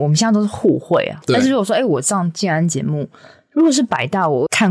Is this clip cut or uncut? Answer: cut